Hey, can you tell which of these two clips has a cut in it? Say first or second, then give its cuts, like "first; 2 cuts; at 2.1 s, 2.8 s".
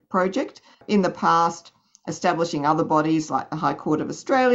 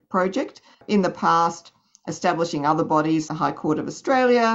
second; 1 cut; at 3.3 s